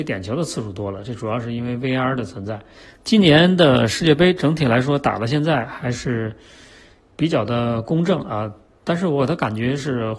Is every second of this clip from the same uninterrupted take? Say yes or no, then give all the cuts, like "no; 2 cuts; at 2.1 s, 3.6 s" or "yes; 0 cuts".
no; 1 cut; at 2.8 s